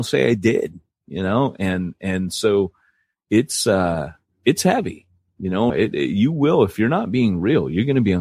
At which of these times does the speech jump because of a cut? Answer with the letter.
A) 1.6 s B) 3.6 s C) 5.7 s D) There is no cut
C